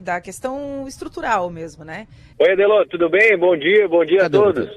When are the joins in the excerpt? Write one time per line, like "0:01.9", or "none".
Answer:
0:02.3